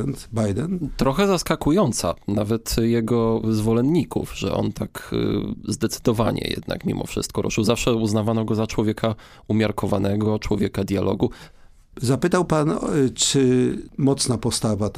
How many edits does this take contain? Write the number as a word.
one